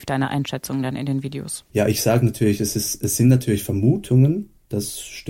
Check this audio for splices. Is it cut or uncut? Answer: uncut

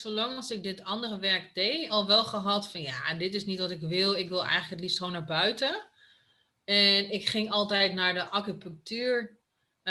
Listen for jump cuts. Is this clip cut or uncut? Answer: uncut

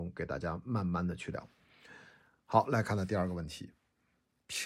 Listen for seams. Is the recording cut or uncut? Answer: uncut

